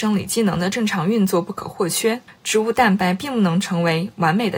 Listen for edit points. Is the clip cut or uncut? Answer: cut